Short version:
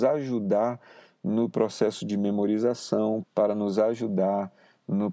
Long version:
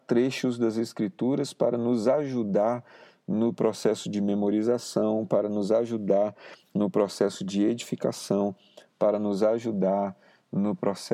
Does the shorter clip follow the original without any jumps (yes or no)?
no